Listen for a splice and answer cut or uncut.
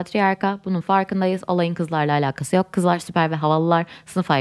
uncut